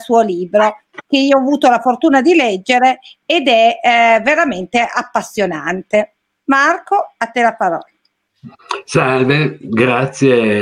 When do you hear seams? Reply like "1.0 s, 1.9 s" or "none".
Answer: none

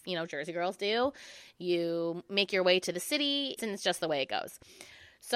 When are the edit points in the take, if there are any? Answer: 3.6 s

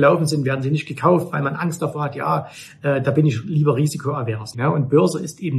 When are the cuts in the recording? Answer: 4.5 s

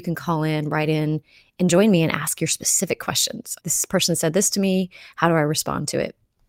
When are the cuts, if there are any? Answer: 3.6 s

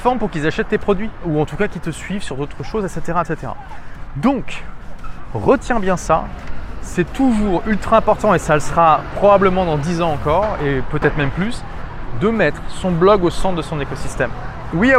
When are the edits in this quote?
none

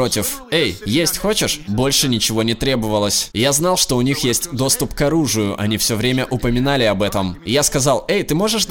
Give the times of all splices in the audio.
1.6 s

